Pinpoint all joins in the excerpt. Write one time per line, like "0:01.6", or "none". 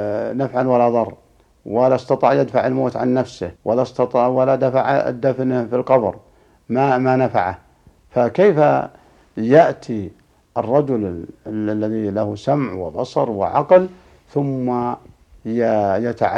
0:03.6

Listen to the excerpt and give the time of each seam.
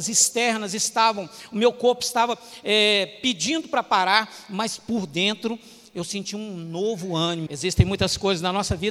0:07.5

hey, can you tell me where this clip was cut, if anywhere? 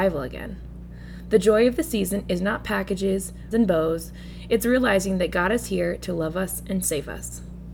0:03.5

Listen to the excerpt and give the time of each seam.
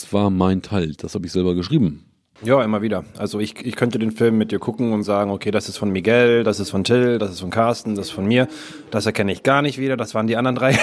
none

